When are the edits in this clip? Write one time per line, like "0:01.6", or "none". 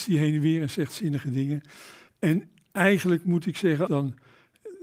0:02.1
0:03.9

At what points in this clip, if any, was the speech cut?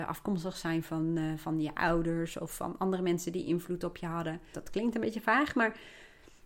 0:04.5

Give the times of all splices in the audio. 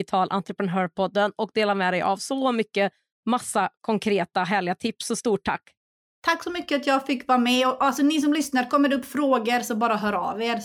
none

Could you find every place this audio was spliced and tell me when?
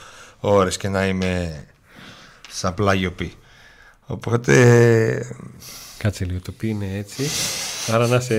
none

